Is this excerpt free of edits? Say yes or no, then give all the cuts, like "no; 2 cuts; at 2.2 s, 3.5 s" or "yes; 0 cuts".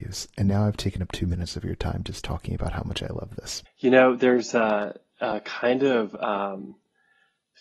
no; 1 cut; at 3.7 s